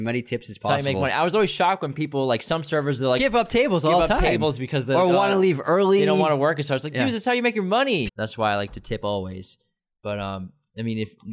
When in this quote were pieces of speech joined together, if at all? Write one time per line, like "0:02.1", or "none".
0:08.1